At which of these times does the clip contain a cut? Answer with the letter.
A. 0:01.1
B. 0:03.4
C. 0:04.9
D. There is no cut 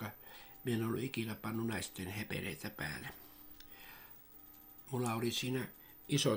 D